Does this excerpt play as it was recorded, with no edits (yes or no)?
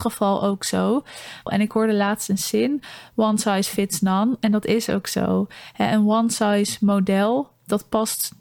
no